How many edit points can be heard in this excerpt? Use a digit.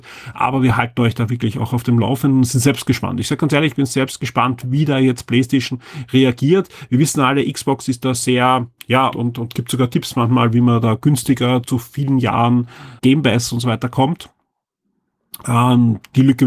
3